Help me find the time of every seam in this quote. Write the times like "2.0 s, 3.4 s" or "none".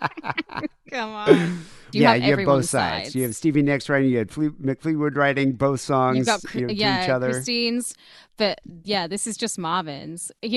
1.9 s